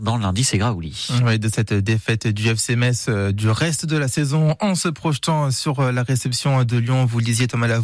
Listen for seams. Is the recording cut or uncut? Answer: uncut